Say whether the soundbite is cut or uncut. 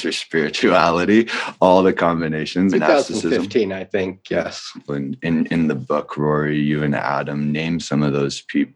cut